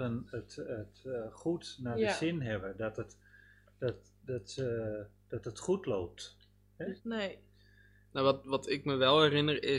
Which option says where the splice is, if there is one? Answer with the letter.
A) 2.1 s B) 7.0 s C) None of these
B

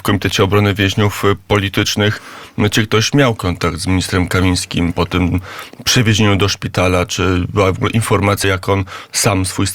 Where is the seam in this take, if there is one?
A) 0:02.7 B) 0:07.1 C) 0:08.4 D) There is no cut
C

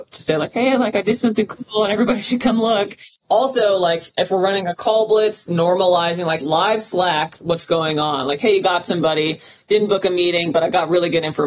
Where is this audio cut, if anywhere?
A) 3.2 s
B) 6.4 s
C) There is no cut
B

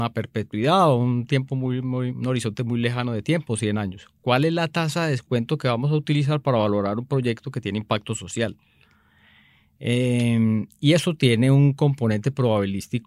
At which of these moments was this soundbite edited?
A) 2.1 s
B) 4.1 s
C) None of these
A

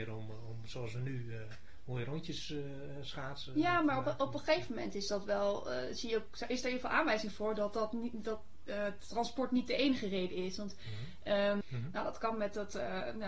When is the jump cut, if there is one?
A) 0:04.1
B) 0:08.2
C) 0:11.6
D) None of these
C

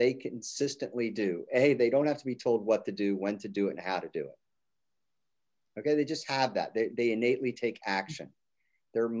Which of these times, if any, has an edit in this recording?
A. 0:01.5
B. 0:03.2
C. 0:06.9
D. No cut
C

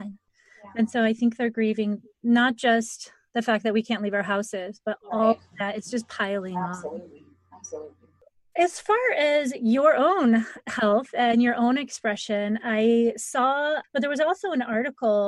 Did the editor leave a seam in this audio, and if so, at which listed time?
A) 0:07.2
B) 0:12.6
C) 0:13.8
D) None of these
C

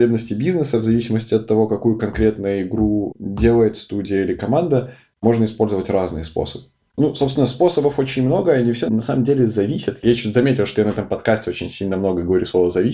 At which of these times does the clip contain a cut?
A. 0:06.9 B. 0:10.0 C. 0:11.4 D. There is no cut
A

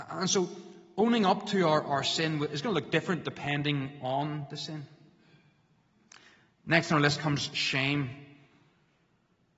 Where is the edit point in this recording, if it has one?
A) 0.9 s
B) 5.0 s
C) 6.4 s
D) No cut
D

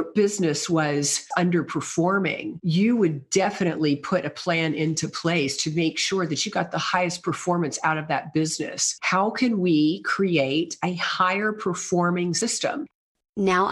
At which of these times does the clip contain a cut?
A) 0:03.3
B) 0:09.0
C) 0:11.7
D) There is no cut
B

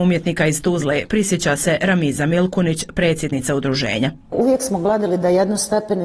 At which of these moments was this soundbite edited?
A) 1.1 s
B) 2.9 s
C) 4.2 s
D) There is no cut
D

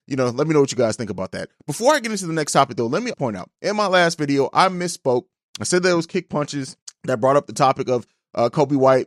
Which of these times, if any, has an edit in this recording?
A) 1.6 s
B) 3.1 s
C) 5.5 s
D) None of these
B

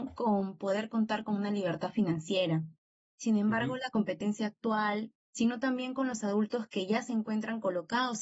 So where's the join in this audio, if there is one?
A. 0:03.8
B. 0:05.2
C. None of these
B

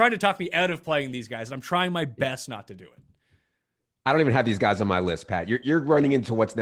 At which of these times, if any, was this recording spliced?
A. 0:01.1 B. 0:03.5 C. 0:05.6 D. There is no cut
C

